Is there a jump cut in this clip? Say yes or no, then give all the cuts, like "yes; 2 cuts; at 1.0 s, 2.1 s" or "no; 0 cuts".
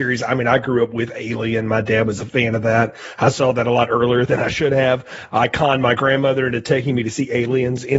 no; 0 cuts